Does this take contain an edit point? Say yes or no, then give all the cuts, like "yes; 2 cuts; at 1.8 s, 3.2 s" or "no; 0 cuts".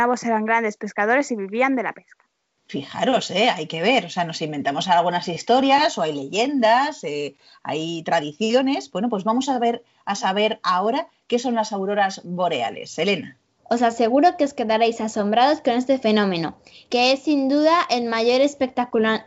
yes; 1 cut; at 13.6 s